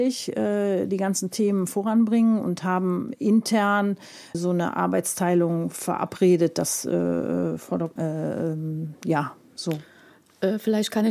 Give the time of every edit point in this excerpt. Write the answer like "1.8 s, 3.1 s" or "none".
4.3 s, 8.0 s